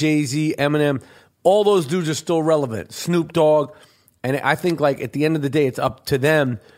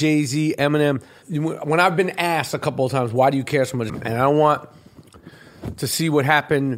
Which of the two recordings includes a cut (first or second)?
second